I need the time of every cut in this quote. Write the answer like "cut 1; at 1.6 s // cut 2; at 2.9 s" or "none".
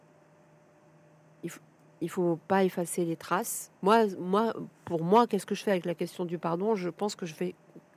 cut 1; at 3.8 s